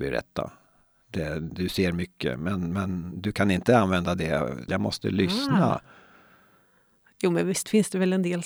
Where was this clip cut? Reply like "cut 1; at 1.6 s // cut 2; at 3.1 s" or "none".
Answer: cut 1; at 4.7 s // cut 2; at 7.1 s